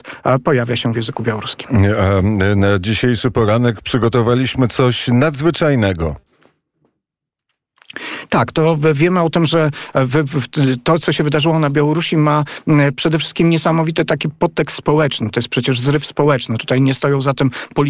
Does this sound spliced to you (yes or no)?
no